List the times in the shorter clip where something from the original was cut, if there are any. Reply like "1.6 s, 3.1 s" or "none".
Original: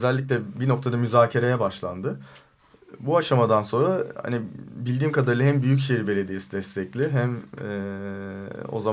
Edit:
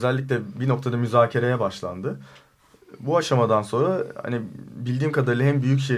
none